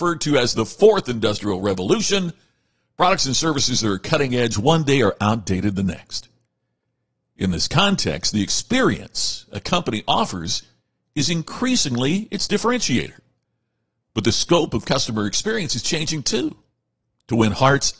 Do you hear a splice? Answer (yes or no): no